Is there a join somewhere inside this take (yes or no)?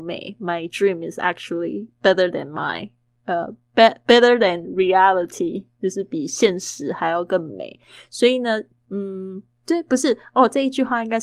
no